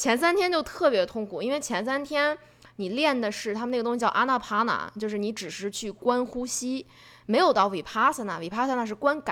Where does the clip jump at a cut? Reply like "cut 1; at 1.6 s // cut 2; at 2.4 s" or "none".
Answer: none